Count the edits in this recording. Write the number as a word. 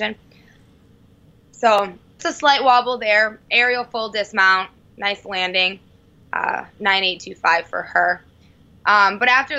one